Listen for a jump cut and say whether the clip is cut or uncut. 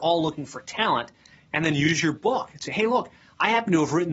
uncut